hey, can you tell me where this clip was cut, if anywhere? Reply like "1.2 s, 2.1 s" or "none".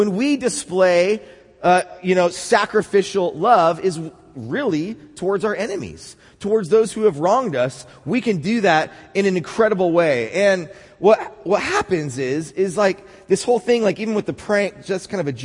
none